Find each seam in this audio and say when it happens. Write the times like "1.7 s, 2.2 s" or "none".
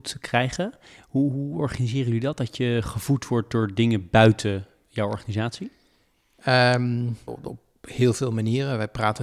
7.3 s